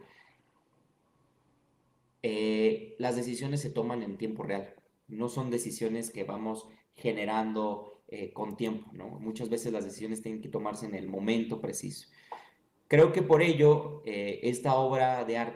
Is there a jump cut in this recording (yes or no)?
no